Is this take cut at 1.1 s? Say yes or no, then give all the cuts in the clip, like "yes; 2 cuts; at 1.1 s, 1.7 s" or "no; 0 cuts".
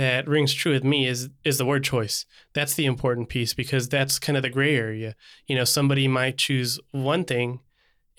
no; 0 cuts